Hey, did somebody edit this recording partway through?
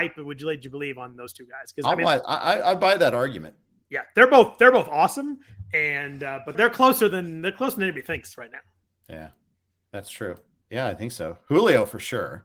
yes; 2 cuts; at 6.5 s, 10.6 s

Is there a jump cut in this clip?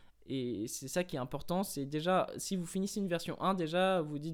no; 0 cuts

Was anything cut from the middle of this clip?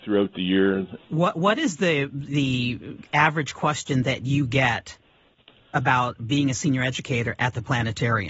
yes; 1 cut; at 1.0 s

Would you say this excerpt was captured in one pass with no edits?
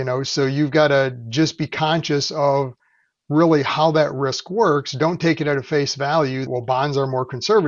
no; 1 cut; at 6.5 s

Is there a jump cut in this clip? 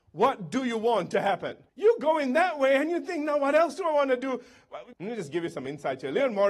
yes; 2 cuts; at 1.7 s, 4.9 s

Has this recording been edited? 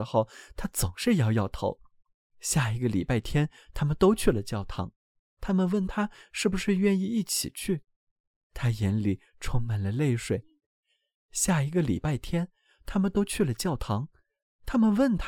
no; 0 cuts

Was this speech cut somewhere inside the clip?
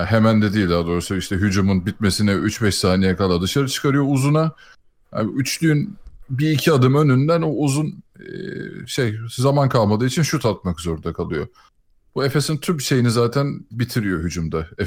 no; 0 cuts

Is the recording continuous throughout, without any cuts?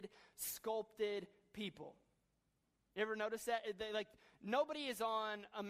yes; 0 cuts

